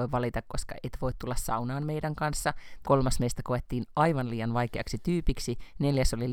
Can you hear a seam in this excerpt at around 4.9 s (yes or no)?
no